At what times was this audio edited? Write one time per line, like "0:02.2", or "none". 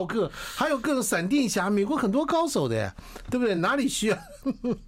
none